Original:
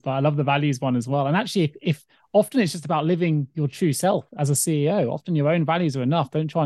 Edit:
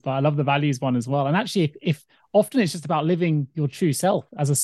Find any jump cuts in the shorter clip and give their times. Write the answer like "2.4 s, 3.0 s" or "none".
none